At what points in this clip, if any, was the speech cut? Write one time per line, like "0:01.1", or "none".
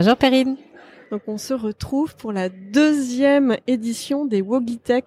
none